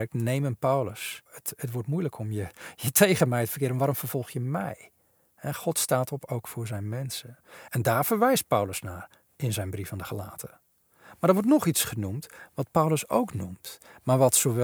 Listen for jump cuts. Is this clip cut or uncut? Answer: cut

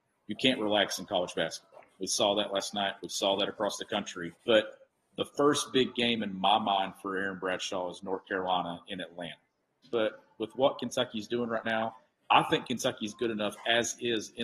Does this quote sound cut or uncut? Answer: cut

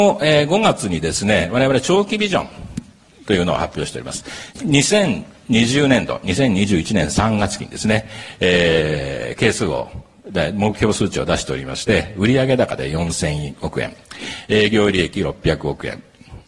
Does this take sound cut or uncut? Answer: uncut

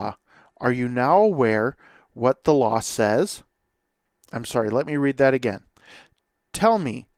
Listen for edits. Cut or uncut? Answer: uncut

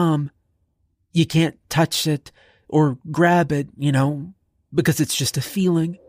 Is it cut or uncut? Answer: uncut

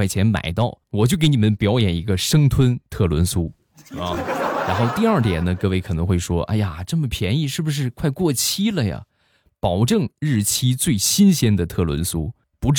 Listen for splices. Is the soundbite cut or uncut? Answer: uncut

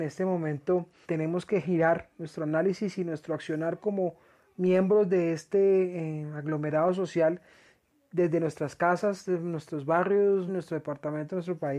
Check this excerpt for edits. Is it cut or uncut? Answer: cut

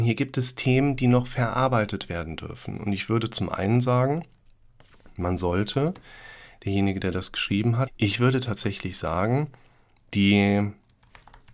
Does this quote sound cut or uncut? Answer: cut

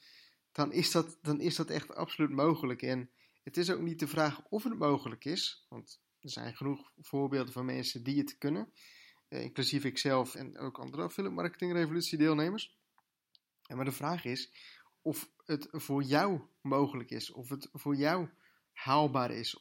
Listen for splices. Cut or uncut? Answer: cut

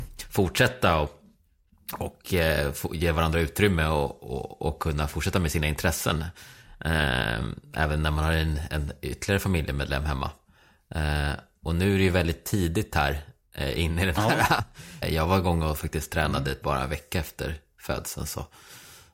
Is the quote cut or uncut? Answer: cut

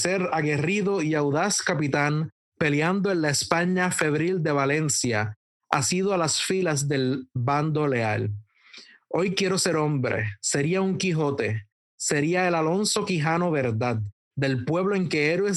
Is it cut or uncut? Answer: uncut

